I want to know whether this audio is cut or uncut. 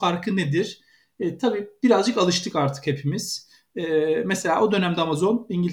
uncut